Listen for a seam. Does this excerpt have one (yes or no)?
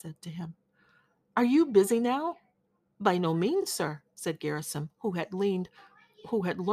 no